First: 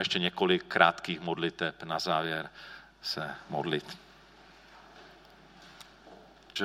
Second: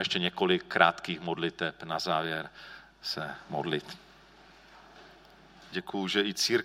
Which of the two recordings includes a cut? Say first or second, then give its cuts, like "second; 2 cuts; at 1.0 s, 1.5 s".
second; 1 cut; at 5.7 s